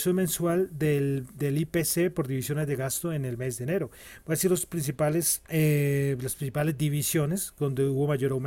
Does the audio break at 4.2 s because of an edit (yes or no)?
no